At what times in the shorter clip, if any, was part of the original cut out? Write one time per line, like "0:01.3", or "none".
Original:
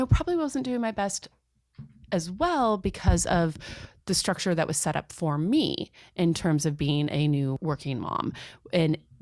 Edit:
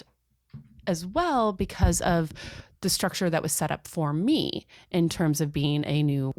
none

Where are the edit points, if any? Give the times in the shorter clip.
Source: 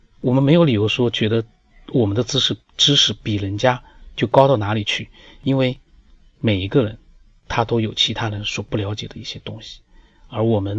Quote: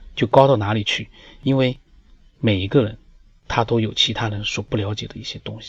none

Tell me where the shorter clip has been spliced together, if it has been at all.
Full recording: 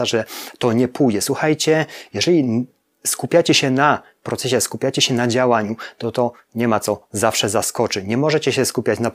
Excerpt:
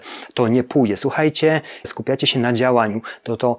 0:01.8

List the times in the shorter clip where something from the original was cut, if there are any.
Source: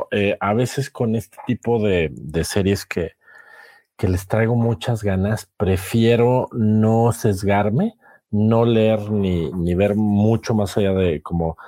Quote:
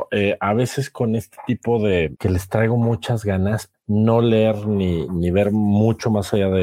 0:02.1
0:03.7

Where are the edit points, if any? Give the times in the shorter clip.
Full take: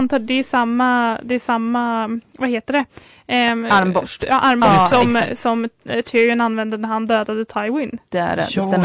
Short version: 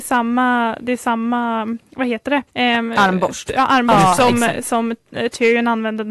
0:02.5

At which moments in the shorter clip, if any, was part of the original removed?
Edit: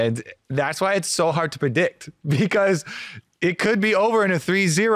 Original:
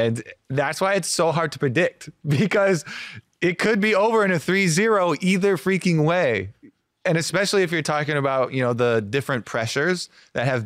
none

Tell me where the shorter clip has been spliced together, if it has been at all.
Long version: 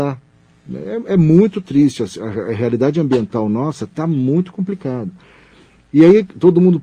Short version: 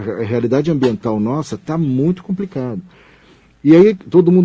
none

